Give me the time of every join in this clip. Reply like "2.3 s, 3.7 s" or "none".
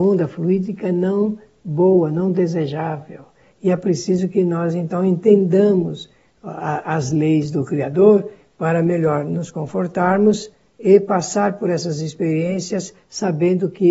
none